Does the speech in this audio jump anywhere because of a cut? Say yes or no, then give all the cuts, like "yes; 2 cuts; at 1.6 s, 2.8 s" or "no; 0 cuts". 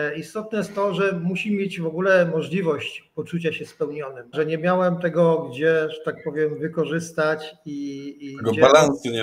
yes; 1 cut; at 4.3 s